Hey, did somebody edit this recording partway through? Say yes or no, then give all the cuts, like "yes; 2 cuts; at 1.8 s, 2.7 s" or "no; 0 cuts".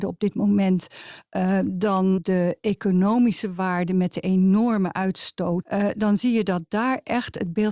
yes; 2 cuts; at 2.2 s, 5.6 s